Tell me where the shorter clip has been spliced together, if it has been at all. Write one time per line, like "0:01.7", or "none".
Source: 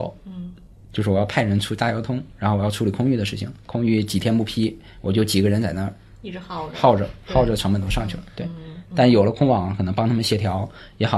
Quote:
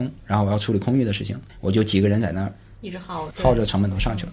0:01.5
0:03.3